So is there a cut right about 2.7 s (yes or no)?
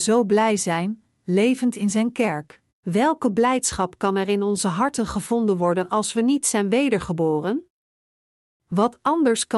yes